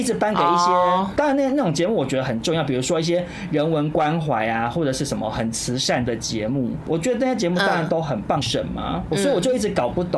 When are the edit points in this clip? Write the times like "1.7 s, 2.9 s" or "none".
8.4 s